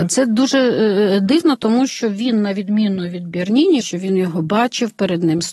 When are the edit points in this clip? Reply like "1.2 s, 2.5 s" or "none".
3.8 s